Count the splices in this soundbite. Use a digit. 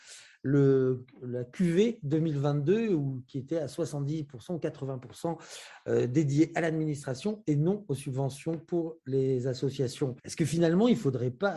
1